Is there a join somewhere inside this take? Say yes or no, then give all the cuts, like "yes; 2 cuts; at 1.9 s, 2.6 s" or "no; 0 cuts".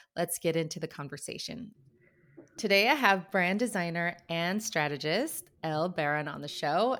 no; 0 cuts